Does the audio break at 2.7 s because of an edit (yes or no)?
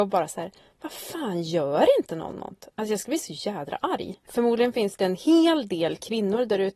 no